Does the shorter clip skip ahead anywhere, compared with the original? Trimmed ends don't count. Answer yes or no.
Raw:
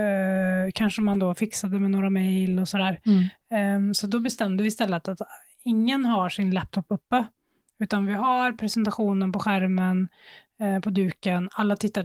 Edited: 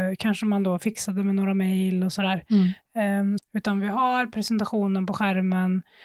yes